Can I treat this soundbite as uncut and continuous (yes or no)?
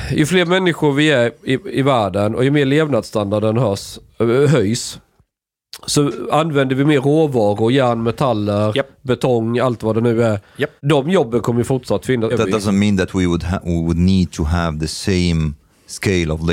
no